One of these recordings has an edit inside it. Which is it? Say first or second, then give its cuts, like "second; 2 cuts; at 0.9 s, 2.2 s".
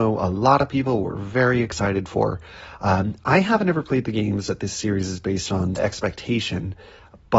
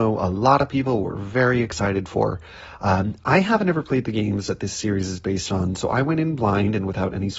first; 1 cut; at 5.8 s